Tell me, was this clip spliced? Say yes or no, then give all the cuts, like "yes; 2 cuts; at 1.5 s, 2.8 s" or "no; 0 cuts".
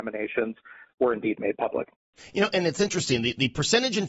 no; 0 cuts